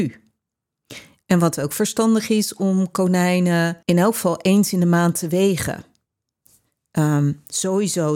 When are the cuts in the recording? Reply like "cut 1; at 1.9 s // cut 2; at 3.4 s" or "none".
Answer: cut 1; at 3.8 s